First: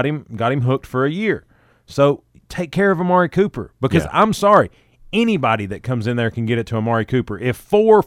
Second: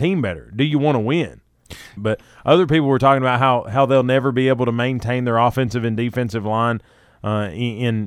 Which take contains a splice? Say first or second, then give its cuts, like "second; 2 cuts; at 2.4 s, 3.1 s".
second; 1 cut; at 2.0 s